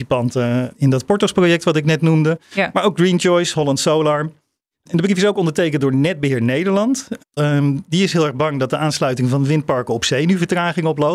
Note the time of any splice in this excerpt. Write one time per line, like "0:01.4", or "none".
0:07.4

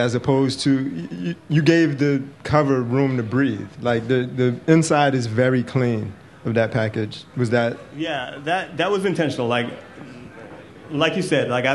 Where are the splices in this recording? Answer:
none

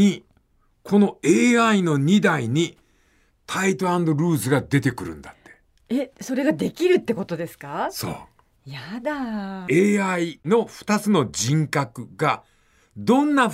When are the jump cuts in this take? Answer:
none

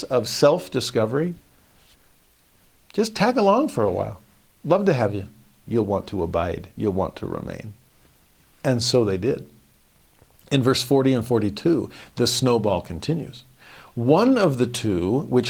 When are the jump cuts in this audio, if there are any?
0:05.6

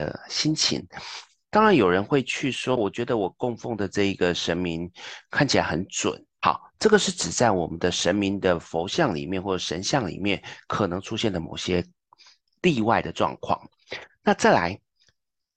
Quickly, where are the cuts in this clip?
0:02.8
0:06.4

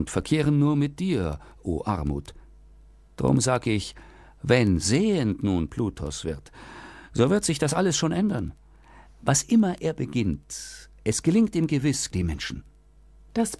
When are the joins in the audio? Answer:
0:12.1

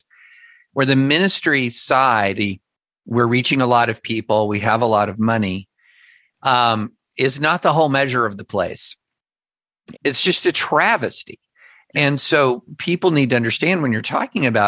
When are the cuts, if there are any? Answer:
0:02.3
0:09.9

